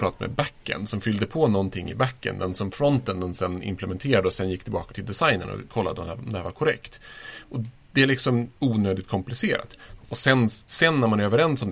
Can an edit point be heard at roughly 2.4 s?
no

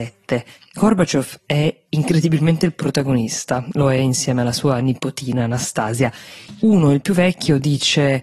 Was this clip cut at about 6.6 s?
yes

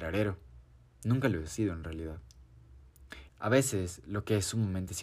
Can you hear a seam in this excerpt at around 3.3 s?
yes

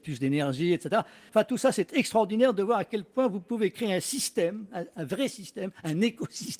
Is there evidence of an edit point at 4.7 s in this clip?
no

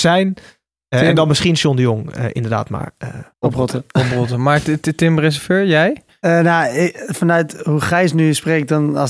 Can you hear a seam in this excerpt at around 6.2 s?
no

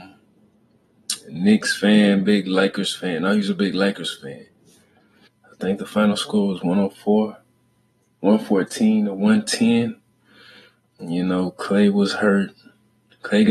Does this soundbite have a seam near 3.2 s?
no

